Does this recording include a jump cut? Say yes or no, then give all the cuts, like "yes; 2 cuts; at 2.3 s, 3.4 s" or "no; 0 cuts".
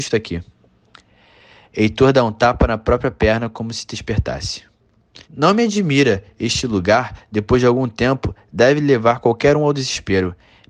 yes; 1 cut; at 5.2 s